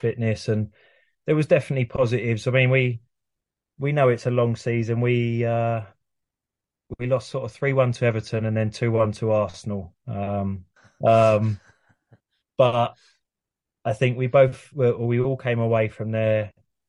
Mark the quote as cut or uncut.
cut